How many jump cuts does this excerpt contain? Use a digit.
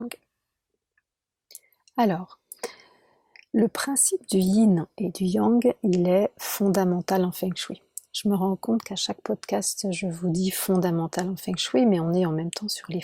0